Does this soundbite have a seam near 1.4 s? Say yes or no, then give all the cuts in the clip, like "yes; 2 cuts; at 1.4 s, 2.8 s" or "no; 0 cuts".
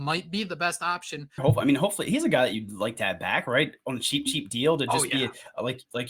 yes; 1 cut; at 1.4 s